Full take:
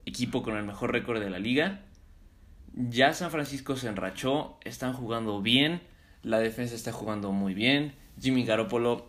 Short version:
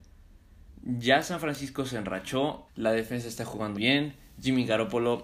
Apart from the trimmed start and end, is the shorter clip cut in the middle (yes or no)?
yes